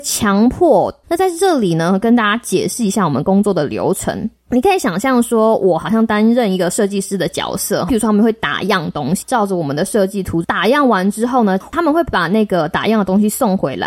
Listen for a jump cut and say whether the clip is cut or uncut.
cut